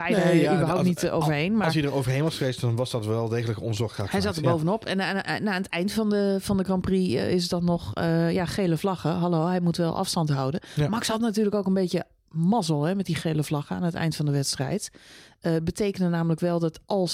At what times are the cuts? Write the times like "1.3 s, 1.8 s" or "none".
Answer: 5.2 s